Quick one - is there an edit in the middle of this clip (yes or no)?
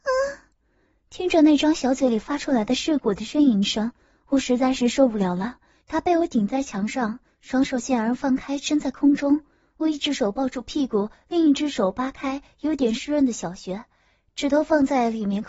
yes